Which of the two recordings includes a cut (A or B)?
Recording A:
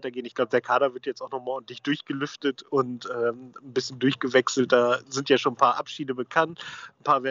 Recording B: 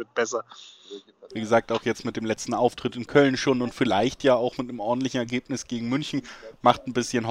B